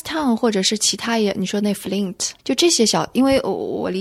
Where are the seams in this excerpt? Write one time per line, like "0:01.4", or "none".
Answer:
0:02.4

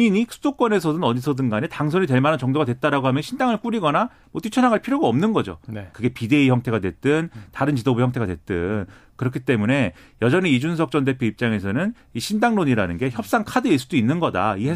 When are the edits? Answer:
0:05.9

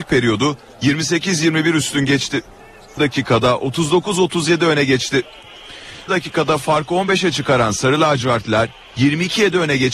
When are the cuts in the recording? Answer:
0:03.0
0:06.1

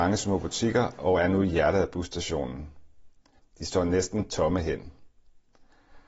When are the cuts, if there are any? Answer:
0:03.4

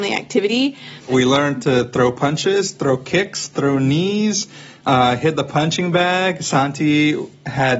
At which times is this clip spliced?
none

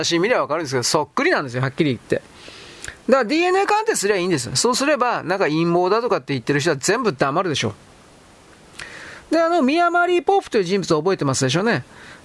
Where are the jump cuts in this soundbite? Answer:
none

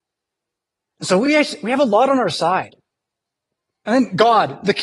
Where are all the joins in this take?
none

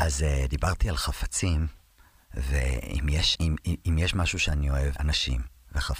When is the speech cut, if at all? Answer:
0:03.3
0:05.0

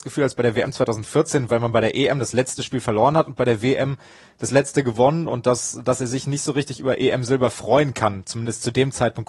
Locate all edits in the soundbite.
none

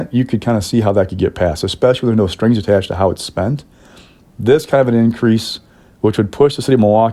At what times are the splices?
none

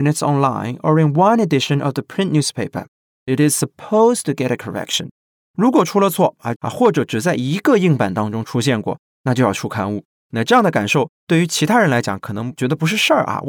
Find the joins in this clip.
0:06.6
0:10.2

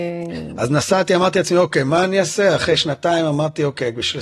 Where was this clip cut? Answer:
none

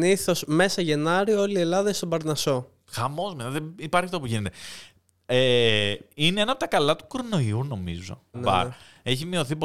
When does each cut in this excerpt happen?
0:08.3

